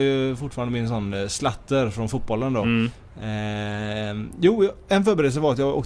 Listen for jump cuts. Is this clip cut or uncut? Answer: uncut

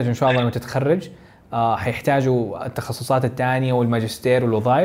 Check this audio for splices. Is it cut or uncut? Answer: uncut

